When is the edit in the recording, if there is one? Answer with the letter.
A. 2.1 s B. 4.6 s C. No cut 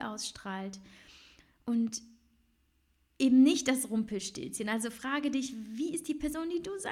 C